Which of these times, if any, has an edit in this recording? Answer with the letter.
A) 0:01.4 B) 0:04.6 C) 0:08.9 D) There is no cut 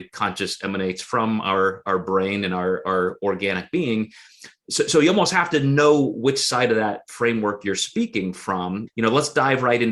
C